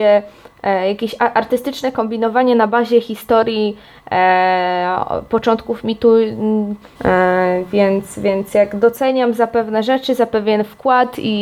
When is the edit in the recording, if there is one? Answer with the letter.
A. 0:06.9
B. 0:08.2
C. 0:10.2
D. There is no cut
A